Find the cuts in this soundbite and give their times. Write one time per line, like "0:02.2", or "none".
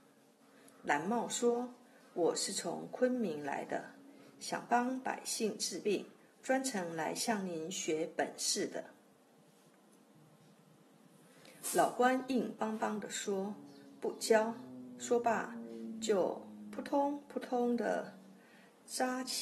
none